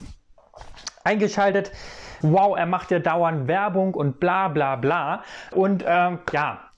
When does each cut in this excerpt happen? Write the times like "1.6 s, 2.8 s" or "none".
2.2 s, 5.5 s